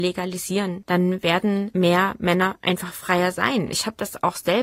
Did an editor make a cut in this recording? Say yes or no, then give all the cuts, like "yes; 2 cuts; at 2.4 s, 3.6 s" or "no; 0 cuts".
no; 0 cuts